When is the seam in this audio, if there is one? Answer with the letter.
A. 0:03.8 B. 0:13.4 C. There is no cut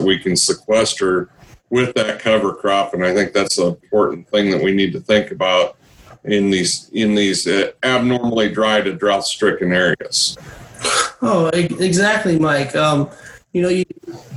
A